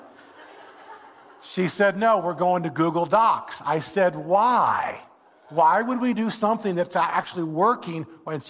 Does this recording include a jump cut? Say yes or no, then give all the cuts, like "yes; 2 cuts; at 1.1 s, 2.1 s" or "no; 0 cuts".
no; 0 cuts